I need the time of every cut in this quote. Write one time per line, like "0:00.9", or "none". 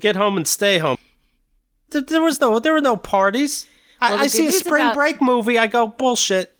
0:01.0

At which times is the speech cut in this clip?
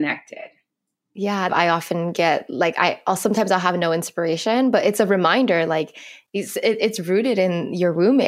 0:01.5

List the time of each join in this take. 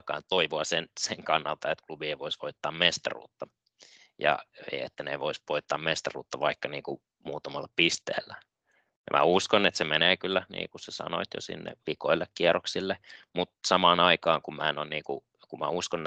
none

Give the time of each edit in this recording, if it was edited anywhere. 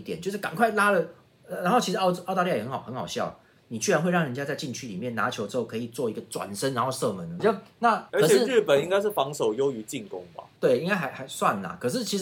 0:07.4

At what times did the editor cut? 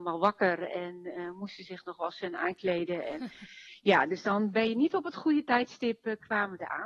none

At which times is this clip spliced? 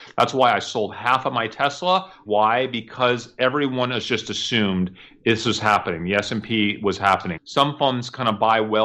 0:02.3
0:07.4

